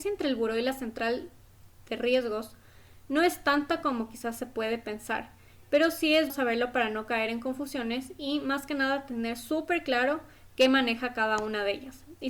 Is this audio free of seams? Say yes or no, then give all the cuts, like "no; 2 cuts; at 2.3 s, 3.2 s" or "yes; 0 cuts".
no; 1 cut; at 6.3 s